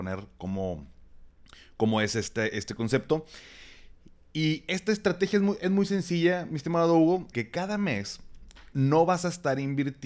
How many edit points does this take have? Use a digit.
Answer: 2